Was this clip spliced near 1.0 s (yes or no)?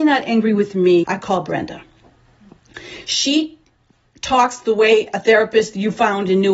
yes